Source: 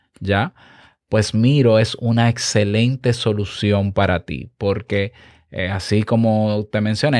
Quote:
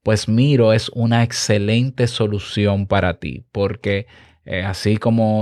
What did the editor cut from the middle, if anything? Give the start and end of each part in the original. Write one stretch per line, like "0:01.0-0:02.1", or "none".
none